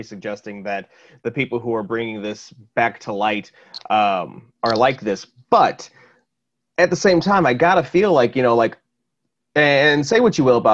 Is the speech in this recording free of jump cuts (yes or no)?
yes